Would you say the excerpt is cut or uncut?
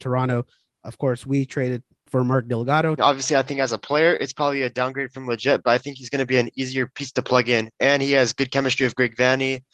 cut